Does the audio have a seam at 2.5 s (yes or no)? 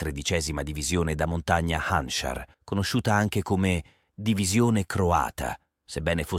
yes